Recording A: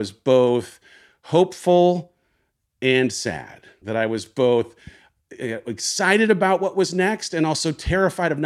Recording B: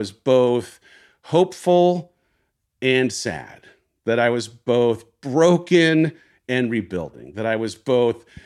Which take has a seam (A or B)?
A